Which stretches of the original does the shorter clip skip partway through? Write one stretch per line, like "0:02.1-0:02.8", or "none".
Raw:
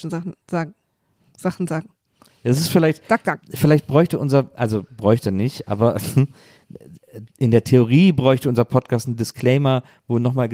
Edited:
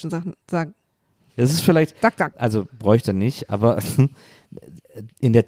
0:01.3-0:02.4
0:03.4-0:04.5